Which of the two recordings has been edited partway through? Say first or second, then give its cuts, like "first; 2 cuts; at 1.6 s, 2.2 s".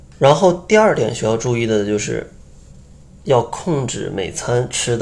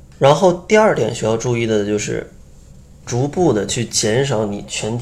second; 1 cut; at 3.0 s